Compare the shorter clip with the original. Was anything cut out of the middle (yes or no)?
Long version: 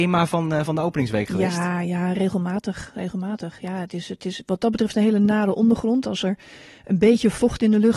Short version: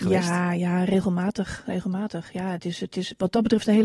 no